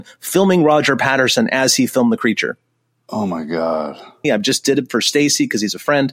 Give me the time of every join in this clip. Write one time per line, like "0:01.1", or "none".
0:04.2